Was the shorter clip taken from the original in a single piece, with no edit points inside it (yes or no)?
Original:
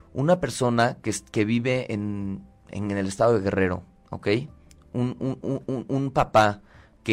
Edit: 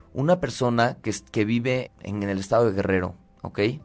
no